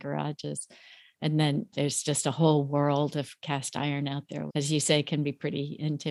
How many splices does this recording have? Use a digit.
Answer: 2